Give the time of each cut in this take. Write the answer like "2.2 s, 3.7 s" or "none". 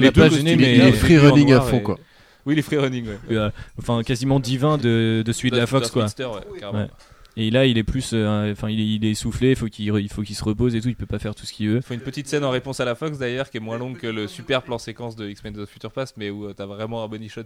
3.3 s, 4.8 s